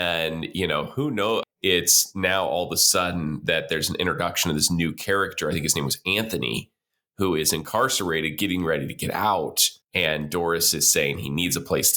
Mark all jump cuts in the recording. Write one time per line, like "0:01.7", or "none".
0:01.4
0:09.8